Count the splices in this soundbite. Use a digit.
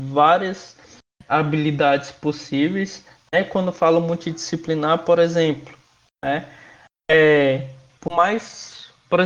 0